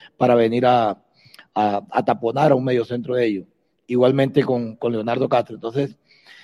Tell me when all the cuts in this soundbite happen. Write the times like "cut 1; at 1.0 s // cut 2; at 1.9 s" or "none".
none